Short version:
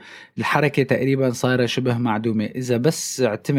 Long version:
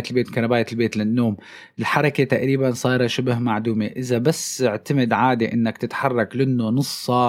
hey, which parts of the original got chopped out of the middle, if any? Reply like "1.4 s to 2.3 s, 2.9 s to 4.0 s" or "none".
none